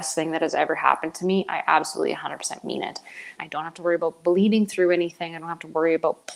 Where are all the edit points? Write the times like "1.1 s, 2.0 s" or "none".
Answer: 3.4 s